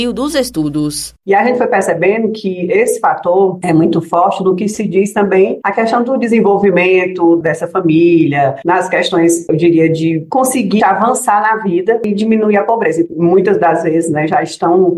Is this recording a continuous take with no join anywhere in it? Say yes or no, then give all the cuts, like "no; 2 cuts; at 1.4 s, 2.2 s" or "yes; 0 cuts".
no; 1 cut; at 10.8 s